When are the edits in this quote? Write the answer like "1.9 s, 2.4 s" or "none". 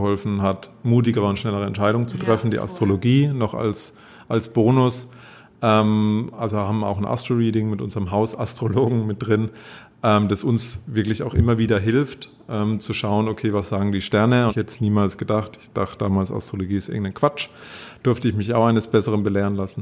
14.5 s